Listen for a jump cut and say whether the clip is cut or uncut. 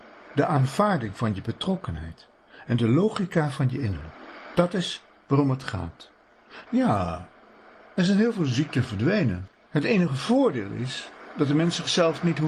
cut